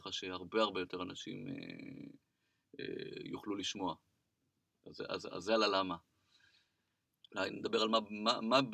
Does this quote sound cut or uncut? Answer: cut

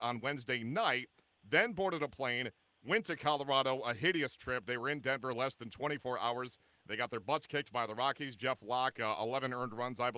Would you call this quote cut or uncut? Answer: uncut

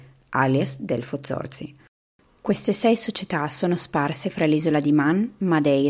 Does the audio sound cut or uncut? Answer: uncut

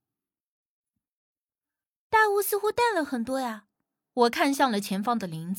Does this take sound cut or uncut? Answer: cut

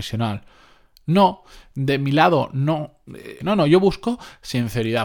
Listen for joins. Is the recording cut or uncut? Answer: cut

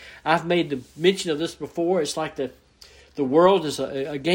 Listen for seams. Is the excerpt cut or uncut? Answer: uncut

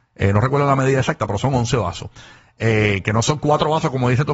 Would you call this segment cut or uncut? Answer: uncut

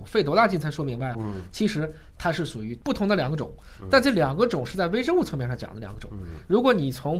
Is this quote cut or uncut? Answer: uncut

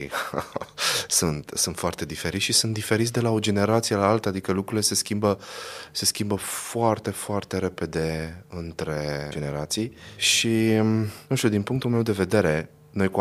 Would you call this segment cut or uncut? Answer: uncut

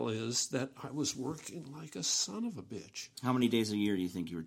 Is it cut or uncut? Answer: uncut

